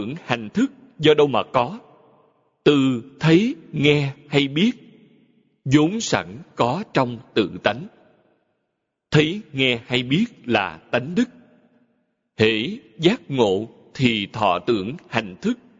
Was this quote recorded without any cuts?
yes; 0 cuts

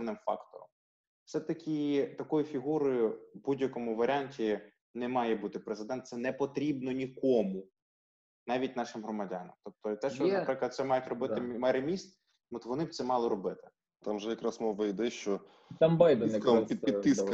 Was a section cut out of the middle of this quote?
yes; 1 cut; at 14.0 s

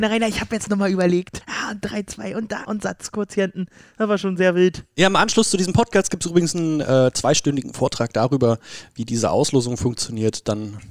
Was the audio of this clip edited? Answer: yes; 2 cuts; at 1.4 s, 2.7 s

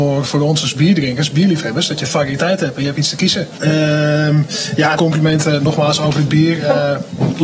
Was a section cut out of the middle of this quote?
yes; 2 cuts; at 3.6 s, 5.0 s

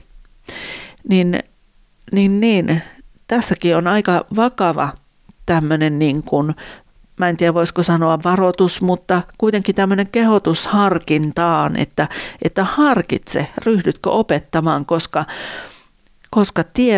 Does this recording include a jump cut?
no; 0 cuts

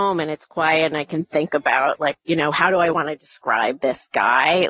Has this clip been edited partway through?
yes; 1 cut; at 2.2 s

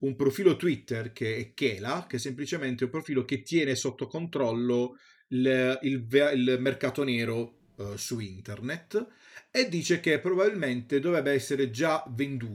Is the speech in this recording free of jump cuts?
yes; 0 cuts

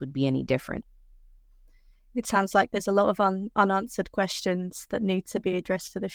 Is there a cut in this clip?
no; 0 cuts

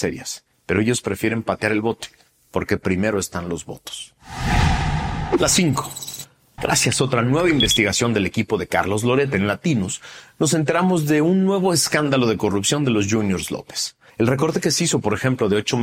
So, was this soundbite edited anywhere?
yes; 2 cuts; at 6.6 s, 14.1 s

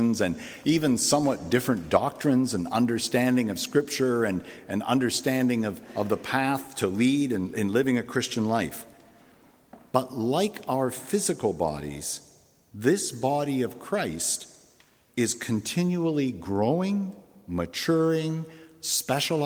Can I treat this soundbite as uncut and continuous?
yes; 0 cuts

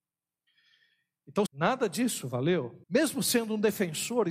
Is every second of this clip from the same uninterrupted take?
no; 2 cuts; at 1.5 s, 2.8 s

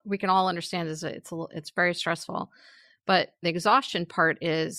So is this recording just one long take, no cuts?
yes; 0 cuts

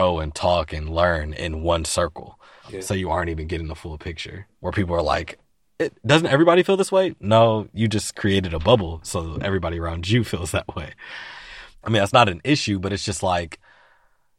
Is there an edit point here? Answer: yes; 1 cut; at 11.8 s

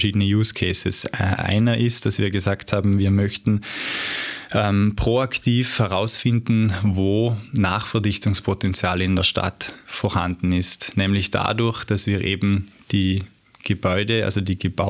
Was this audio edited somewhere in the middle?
no; 0 cuts

